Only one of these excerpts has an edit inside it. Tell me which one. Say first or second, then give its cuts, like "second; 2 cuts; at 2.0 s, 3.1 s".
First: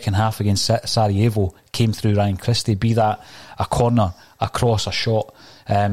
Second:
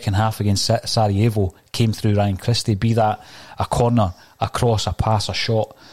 first; 1 cut; at 4.9 s